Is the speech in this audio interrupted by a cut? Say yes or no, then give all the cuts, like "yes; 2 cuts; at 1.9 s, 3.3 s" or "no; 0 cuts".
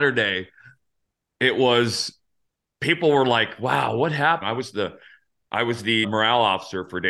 yes; 2 cuts; at 4.4 s, 6.0 s